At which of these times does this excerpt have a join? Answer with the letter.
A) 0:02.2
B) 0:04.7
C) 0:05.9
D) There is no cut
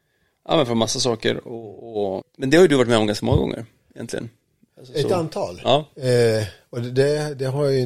A